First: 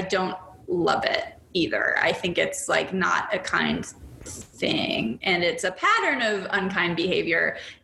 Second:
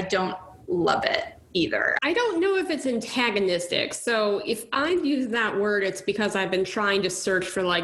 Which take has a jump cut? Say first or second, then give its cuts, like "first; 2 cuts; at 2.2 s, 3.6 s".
second; 1 cut; at 2.0 s